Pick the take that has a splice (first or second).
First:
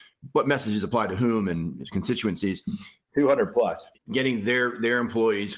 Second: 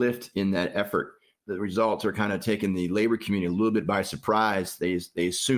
first